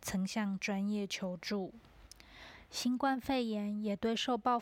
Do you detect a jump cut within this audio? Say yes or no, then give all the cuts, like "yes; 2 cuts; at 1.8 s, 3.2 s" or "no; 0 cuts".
no; 0 cuts